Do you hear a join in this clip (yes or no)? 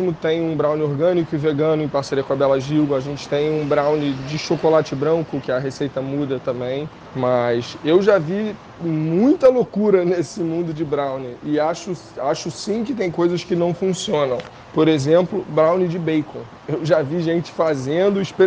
no